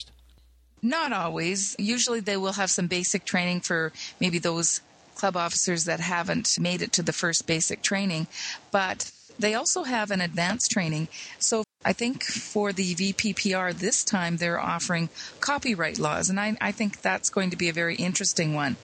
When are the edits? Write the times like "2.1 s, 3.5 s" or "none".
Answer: 11.6 s